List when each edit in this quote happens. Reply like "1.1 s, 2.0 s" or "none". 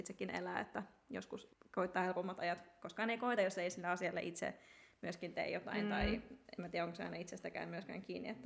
none